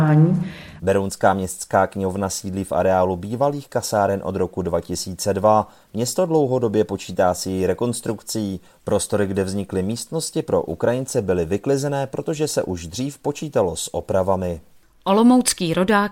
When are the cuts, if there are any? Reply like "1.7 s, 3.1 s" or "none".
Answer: none